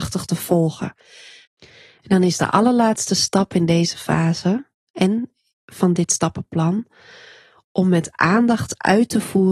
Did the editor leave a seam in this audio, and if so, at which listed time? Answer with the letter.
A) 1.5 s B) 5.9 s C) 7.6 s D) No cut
A